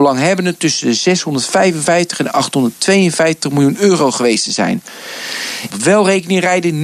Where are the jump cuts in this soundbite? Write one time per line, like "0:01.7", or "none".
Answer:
0:05.7